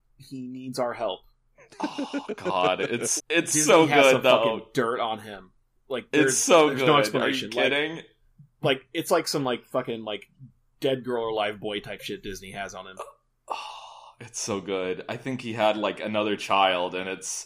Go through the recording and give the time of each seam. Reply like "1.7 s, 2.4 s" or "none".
3.2 s